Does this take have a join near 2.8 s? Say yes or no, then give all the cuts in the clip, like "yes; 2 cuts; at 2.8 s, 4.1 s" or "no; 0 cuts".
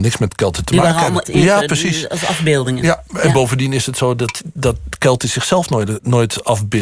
no; 1 cut; at 1.2 s